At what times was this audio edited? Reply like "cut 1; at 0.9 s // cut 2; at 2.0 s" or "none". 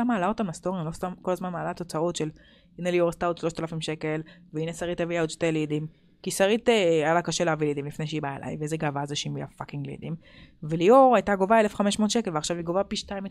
none